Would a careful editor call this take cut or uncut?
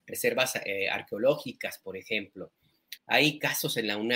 cut